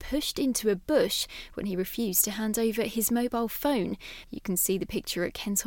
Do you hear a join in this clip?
yes; 1 cut; at 4.2 s

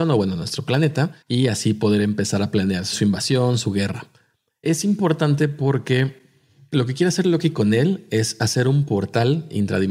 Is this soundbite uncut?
no; 1 cut; at 1.2 s

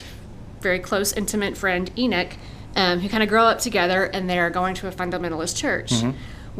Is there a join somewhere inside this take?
no; 0 cuts

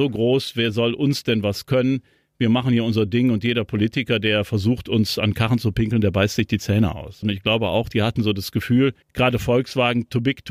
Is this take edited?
yes; 2 cuts; at 7.2 s, 9.0 s

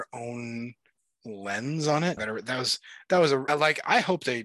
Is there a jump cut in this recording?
yes; 2 cuts; at 2.2 s, 3.5 s

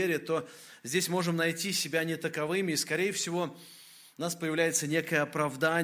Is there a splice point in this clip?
no; 0 cuts

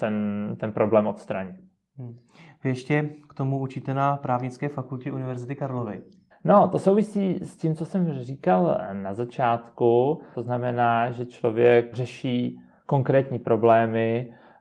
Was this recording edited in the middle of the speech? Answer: yes; 3 cuts; at 6.3 s, 10.3 s, 11.9 s

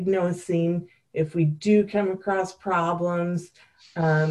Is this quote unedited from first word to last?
yes; 0 cuts

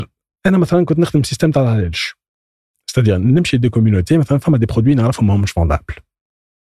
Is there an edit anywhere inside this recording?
no; 0 cuts

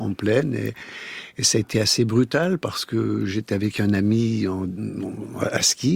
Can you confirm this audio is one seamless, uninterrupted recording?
yes; 0 cuts

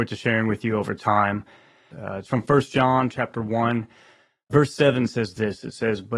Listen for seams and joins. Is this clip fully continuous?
no; 1 cut; at 1.9 s

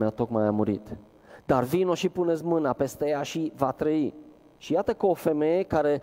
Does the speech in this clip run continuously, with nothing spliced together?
no; 1 cut; at 4.6 s

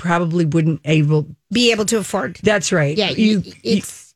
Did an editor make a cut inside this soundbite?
no; 0 cuts

